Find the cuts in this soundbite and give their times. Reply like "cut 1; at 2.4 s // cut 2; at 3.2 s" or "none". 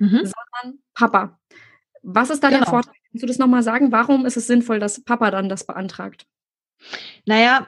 none